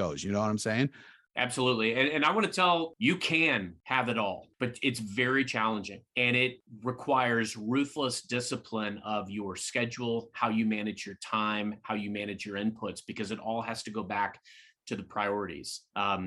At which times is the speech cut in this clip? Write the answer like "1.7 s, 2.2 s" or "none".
none